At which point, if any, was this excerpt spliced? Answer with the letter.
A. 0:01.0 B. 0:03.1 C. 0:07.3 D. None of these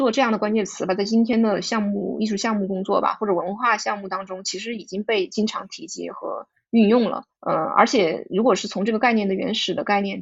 C